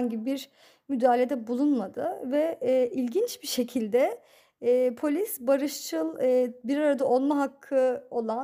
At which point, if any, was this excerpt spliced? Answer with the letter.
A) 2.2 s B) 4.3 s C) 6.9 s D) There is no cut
D